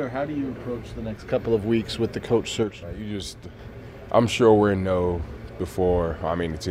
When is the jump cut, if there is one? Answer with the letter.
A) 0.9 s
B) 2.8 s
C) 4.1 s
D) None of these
B